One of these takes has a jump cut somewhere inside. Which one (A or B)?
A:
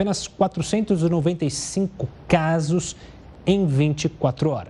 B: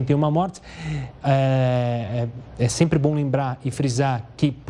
B